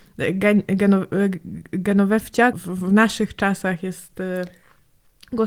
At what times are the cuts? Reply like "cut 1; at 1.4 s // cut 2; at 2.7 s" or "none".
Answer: cut 1; at 2.5 s